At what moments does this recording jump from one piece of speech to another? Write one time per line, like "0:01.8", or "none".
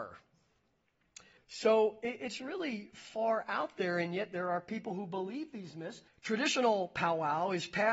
0:01.4
0:06.1